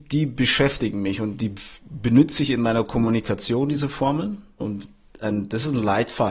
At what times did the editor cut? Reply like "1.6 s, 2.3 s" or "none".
4.6 s